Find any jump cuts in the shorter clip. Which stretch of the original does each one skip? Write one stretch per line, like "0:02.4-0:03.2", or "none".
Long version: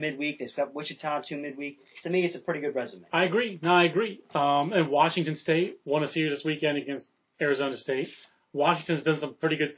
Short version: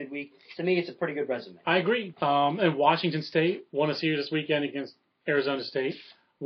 0:03.6-0:04.3